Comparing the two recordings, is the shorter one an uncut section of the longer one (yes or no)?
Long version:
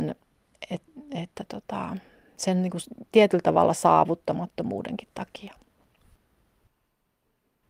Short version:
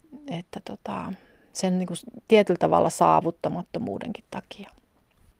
yes